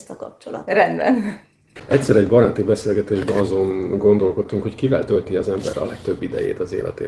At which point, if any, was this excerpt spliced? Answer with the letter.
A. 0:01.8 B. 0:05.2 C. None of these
A